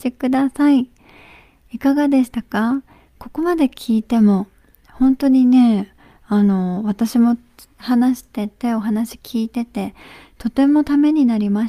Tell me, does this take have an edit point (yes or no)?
no